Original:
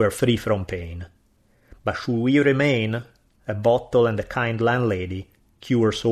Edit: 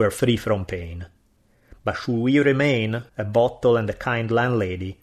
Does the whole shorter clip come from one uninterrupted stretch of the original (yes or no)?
no